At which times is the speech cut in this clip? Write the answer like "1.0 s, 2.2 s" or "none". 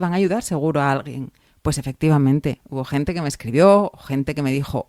none